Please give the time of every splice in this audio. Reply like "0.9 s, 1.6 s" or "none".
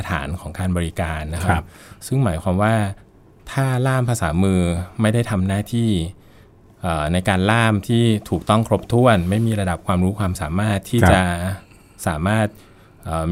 none